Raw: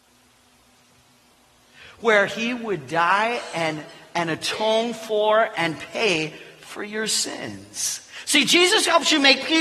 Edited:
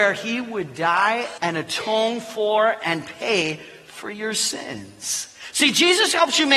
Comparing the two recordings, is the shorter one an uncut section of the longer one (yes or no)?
no